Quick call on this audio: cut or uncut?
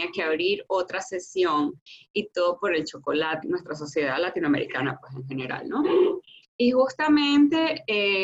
cut